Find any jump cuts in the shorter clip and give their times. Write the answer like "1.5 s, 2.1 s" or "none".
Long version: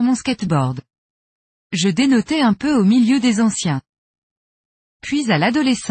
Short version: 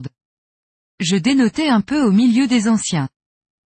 none